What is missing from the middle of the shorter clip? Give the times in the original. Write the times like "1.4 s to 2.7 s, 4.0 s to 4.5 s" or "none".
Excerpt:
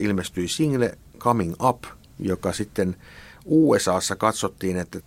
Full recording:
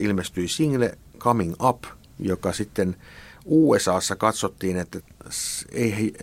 none

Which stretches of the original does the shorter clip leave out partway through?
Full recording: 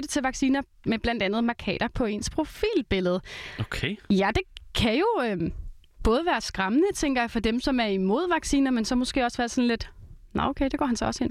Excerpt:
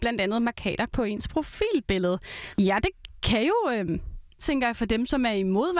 3.5 s to 4.0 s, 5.9 s to 6.9 s

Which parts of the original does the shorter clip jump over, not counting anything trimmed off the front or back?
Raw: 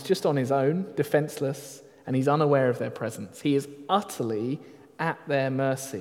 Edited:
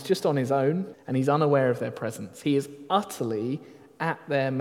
0.9 s to 1.9 s

